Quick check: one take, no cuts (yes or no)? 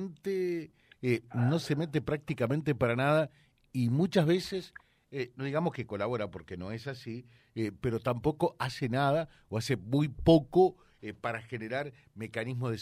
yes